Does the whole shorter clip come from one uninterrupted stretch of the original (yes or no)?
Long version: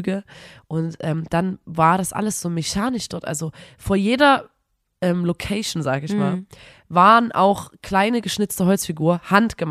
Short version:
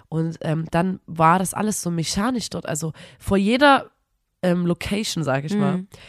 yes